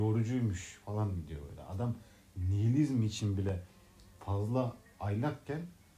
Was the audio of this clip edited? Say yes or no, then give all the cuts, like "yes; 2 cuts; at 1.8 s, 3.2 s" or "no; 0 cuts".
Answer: no; 0 cuts